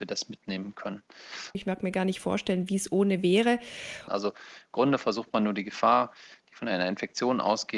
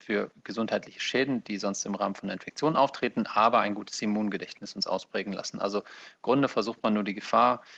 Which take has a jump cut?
first; 2 cuts; at 1.5 s, 4.1 s

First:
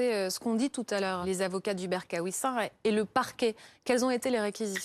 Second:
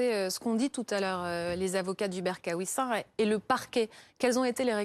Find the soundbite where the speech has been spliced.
first; 1 cut; at 1.2 s

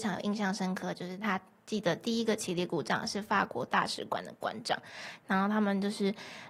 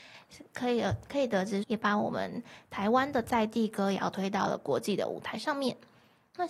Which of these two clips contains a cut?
second; 1 cut; at 1.6 s

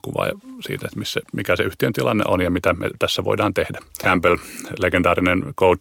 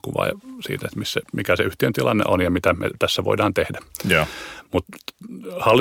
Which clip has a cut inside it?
first; 1 cut; at 4.0 s

